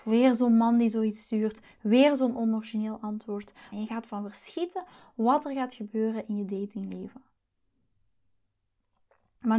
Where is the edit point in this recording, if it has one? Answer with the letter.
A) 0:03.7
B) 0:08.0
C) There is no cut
A